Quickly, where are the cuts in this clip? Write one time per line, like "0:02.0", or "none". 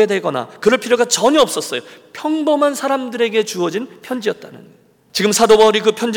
0:05.1